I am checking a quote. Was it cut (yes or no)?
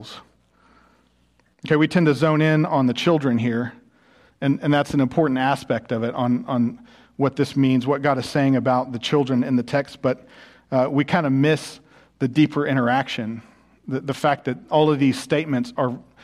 yes